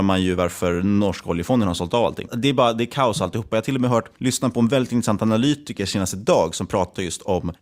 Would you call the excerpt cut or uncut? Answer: cut